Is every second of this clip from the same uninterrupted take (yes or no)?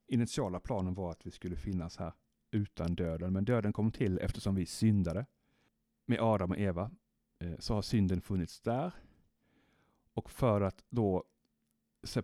yes